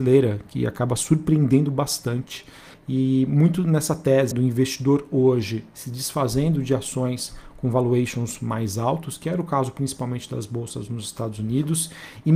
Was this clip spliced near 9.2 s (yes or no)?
no